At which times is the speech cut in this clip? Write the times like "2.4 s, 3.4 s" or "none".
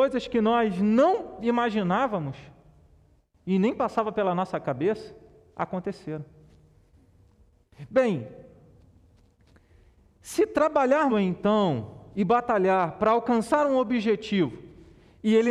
11.1 s